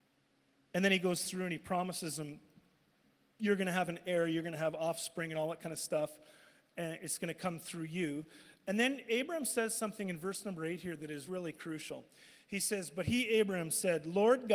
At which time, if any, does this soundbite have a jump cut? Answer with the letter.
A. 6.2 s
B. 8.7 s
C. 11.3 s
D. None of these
C